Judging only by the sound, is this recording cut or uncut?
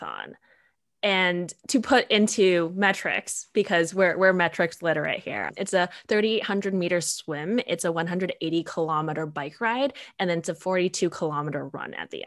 uncut